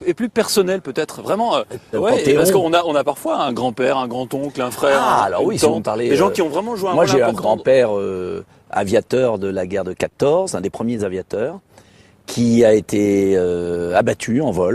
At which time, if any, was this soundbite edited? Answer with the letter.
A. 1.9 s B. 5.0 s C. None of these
A